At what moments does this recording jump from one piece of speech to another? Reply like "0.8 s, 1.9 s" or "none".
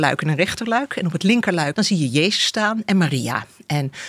1.7 s

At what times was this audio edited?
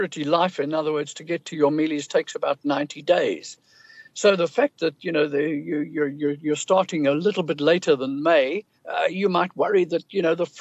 8.8 s

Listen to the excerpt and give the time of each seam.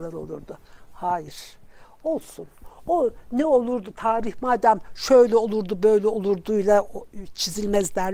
none

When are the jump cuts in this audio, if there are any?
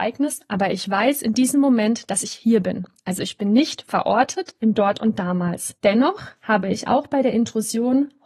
5.8 s

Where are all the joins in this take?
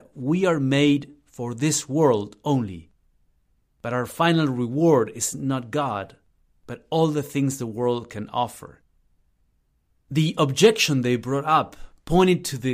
3.6 s

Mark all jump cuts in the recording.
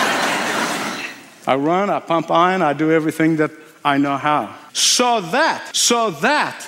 4.7 s, 5.7 s

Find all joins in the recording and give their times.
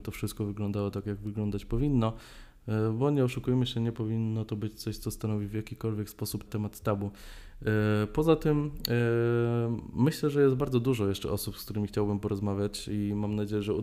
6.5 s

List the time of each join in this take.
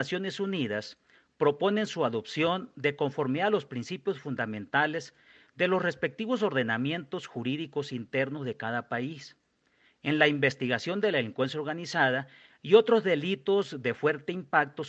none

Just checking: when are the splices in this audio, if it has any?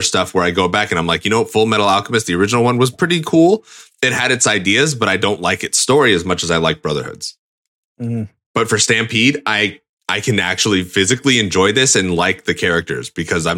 none

